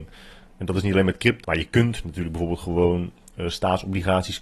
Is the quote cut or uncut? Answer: cut